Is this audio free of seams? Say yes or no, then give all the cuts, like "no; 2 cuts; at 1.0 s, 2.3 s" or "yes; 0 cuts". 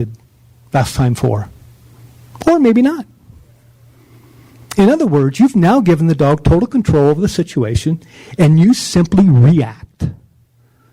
yes; 0 cuts